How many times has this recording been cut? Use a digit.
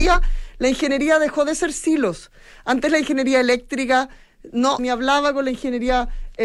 1